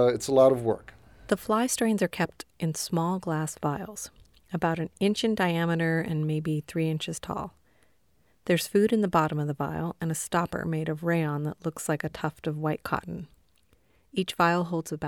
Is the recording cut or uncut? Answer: uncut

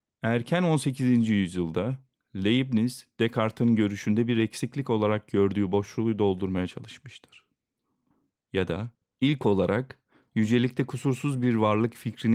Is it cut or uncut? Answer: uncut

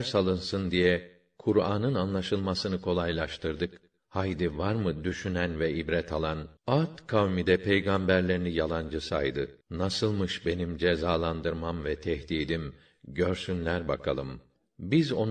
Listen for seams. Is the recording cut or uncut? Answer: cut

